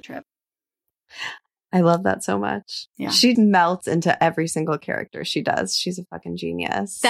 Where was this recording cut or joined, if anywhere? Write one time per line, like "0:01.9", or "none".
0:03.3